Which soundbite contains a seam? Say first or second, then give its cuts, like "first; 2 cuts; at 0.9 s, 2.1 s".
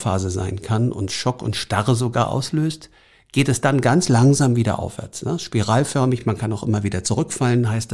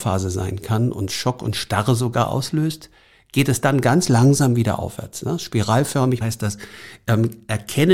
second; 1 cut; at 6.2 s